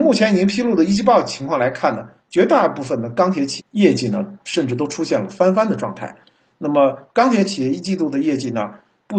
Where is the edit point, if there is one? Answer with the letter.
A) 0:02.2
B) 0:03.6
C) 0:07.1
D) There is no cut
B